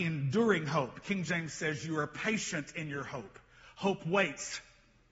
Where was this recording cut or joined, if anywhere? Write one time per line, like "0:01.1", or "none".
none